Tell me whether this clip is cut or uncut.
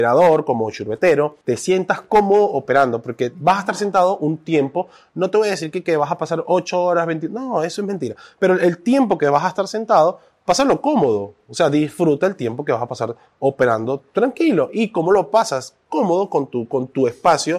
cut